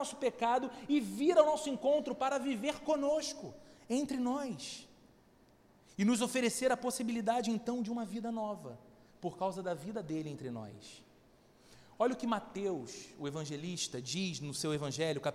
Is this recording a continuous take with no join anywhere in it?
yes; 0 cuts

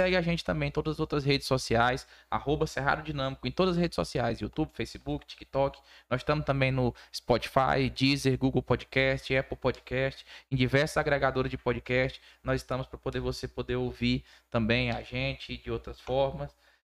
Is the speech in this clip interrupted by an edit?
no; 0 cuts

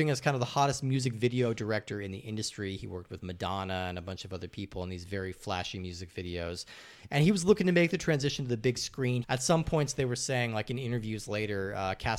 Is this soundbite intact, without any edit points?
no; 1 cut; at 9.2 s

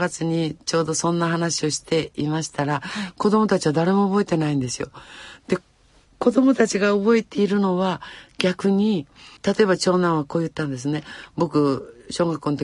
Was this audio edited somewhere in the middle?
yes; 1 cut; at 9.4 s

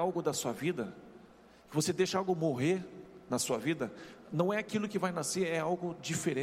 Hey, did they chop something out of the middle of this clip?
no; 0 cuts

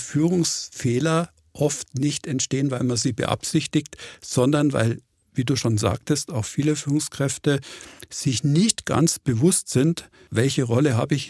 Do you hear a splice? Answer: no; 0 cuts

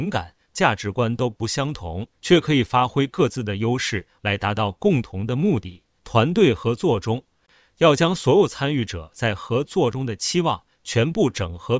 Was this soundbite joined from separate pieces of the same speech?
yes; 3 cuts; at 2.1 s, 4.2 s, 6.0 s

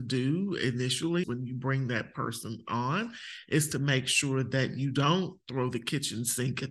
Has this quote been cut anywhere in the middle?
yes; 1 cut; at 1.2 s

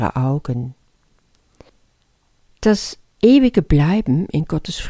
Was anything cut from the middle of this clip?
no; 0 cuts

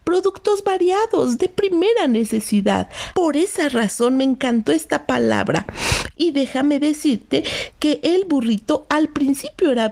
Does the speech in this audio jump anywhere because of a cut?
yes; 2 cuts; at 3.1 s, 6.1 s

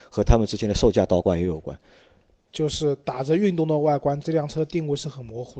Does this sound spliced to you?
yes; 2 cuts; at 2.5 s, 4.2 s

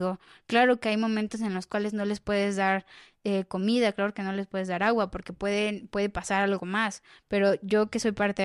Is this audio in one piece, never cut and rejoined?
yes; 0 cuts

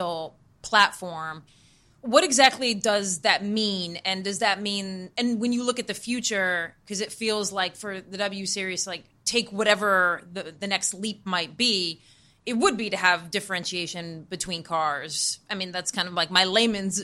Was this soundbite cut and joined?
no; 0 cuts

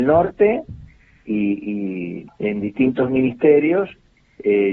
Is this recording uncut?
no; 1 cut; at 2.3 s

